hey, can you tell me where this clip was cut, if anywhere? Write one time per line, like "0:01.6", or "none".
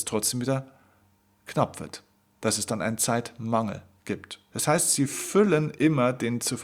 0:04.5